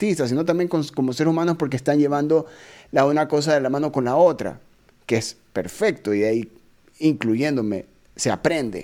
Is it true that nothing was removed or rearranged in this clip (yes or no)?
yes